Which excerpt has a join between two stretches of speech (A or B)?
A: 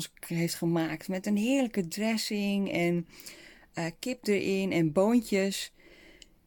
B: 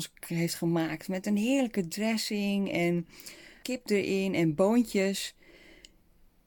B